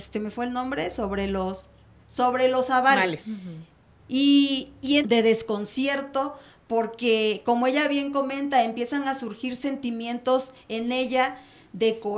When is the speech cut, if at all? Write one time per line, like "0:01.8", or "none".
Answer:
0:03.2
0:05.0